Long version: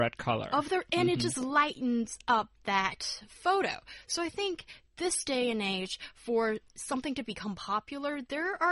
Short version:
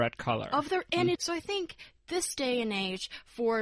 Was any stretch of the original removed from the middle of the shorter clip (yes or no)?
yes